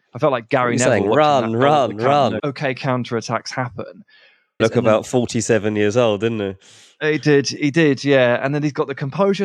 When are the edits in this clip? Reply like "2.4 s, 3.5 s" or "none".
2.4 s, 4.6 s